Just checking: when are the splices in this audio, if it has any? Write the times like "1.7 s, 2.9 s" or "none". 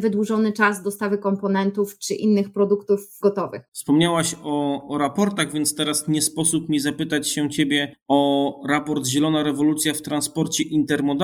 3.7 s